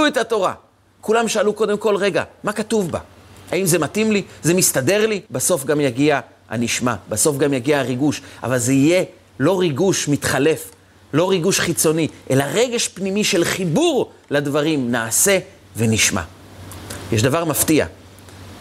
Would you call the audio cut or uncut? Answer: cut